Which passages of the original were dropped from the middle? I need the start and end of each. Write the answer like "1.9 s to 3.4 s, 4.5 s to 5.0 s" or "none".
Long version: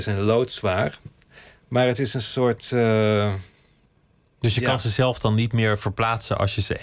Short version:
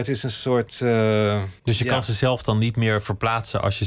3.5 s to 4.3 s